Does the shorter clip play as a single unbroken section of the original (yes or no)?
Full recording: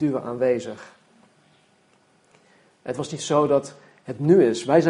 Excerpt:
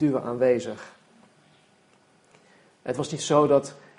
yes